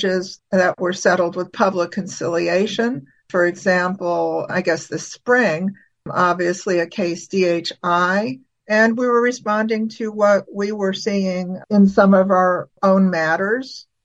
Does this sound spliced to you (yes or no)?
yes